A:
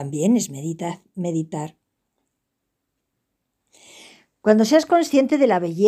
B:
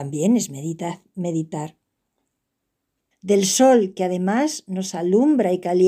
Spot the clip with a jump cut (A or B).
B